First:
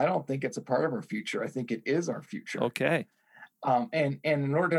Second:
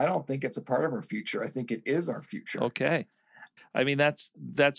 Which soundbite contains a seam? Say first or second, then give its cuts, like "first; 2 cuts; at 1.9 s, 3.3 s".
second; 1 cut; at 3.6 s